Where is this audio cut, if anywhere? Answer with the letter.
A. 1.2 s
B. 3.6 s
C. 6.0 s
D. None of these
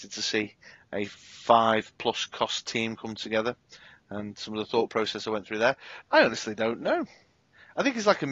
C